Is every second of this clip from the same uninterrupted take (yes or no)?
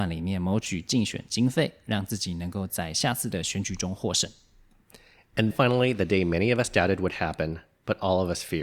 no